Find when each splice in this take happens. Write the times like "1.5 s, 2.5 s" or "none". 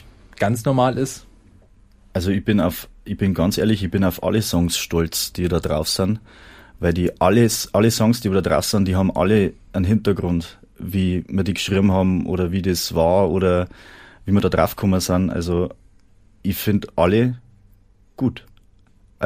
none